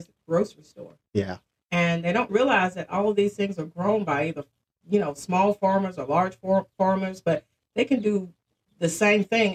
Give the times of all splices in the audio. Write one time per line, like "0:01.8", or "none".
0:02.3